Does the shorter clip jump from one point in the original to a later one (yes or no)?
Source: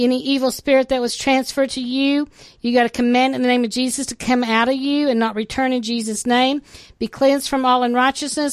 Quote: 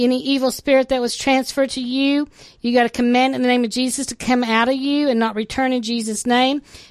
no